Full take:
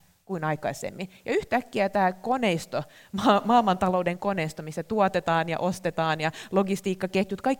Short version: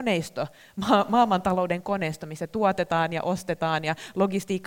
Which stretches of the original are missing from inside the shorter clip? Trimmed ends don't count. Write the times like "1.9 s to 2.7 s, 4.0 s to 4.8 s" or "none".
none